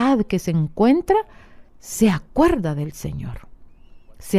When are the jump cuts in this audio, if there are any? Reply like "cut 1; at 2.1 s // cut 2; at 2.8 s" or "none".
cut 1; at 1.7 s